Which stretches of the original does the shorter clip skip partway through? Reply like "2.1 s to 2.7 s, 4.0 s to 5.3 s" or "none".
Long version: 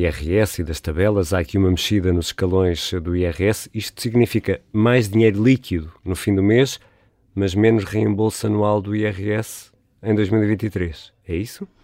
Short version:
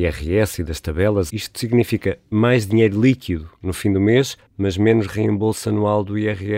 1.3 s to 3.7 s, 6.9 s to 7.2 s